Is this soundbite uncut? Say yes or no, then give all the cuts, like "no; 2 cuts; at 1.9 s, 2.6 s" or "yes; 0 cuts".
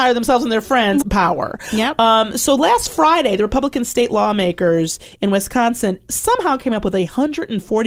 no; 1 cut; at 1.0 s